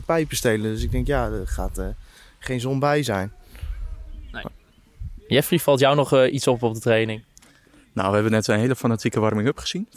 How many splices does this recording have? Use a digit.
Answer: 0